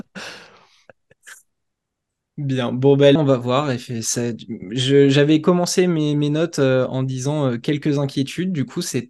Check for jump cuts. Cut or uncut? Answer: cut